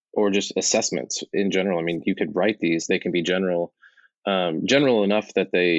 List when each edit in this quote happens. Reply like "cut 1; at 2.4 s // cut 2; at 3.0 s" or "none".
none